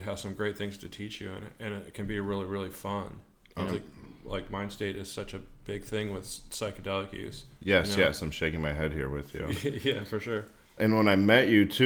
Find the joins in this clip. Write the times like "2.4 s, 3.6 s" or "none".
3.7 s, 7.5 s, 10.8 s